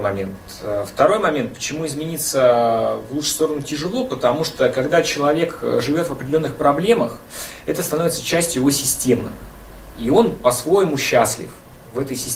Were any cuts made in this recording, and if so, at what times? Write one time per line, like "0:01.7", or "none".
none